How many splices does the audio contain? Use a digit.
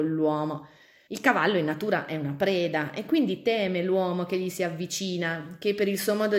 1